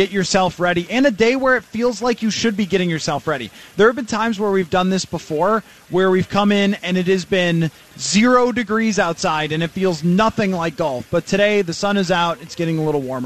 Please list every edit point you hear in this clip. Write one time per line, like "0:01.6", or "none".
none